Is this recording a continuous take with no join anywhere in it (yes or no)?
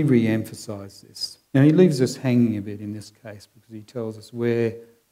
no